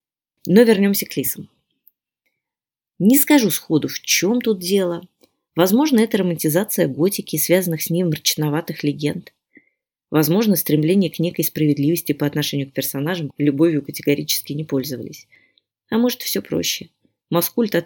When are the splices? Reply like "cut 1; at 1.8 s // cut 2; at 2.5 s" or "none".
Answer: cut 1; at 13.3 s